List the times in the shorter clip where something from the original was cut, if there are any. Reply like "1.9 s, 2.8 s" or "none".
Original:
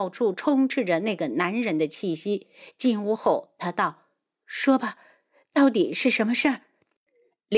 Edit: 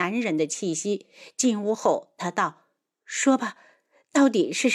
none